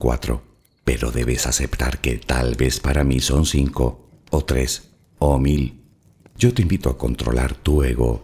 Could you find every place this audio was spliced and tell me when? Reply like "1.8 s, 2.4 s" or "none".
6.2 s